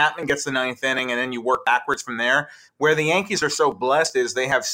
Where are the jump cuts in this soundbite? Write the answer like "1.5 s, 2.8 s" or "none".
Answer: none